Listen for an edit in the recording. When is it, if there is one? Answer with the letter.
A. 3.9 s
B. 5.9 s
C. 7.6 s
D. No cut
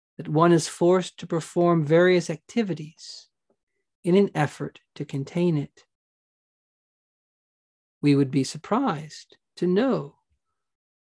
D